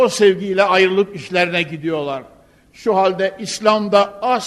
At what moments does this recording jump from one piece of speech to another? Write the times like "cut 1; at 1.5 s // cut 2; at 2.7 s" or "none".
none